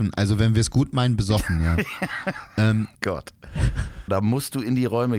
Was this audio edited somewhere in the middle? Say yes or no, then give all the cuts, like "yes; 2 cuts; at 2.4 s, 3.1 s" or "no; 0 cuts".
yes; 2 cuts; at 3.0 s, 4.1 s